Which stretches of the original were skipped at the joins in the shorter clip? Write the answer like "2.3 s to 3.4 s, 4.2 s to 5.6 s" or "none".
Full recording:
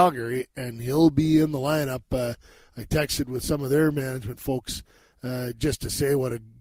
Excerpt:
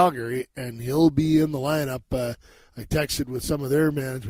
none